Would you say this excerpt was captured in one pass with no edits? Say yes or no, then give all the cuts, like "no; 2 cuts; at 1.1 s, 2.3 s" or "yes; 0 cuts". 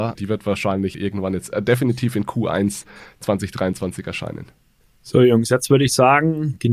yes; 0 cuts